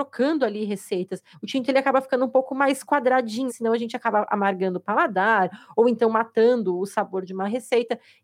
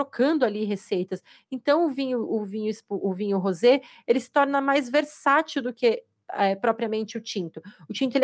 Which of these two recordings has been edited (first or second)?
first